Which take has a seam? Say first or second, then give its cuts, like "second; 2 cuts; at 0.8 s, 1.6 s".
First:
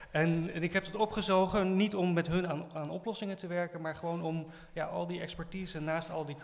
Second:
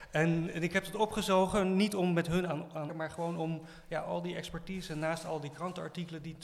second; 1 cut; at 2.9 s